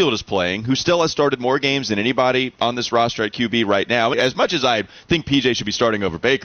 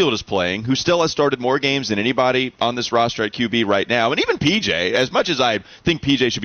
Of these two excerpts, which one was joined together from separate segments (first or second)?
first